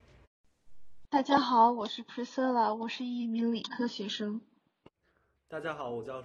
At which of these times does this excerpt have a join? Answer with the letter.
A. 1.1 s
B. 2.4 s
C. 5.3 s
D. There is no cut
A